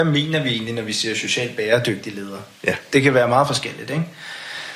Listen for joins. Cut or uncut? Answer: uncut